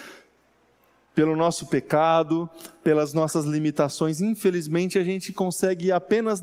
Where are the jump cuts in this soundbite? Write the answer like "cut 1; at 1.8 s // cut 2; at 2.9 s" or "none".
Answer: none